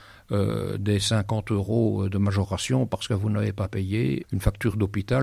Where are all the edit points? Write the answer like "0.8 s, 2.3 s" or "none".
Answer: 4.2 s